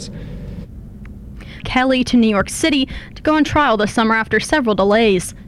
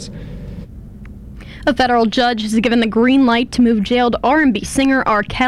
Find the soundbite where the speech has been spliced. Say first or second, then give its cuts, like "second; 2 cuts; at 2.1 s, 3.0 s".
first; 1 cut; at 1.6 s